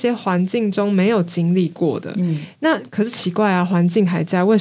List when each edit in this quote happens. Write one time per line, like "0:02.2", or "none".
none